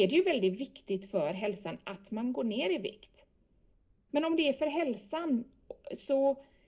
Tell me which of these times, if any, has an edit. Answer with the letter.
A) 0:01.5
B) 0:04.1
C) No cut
B